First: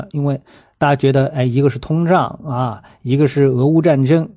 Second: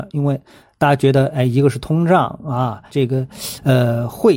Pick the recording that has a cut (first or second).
second